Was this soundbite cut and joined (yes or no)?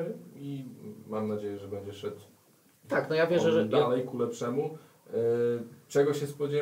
no